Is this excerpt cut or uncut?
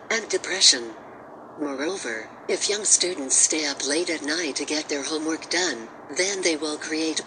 uncut